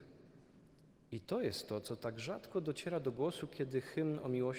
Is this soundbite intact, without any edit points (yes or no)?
yes